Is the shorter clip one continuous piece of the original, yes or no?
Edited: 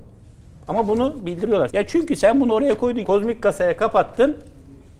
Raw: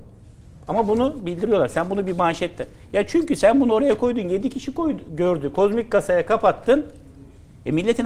no